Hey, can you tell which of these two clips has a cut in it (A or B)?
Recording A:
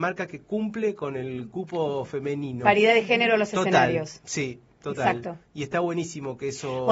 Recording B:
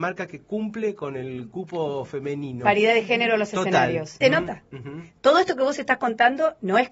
B